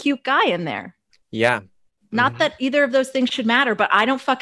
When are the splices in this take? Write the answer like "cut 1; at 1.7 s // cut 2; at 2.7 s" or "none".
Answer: none